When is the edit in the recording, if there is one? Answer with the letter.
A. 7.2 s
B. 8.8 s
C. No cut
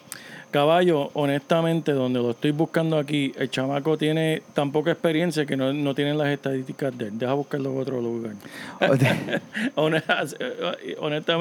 B